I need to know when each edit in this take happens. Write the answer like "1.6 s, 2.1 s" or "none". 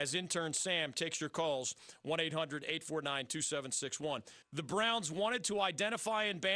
4.4 s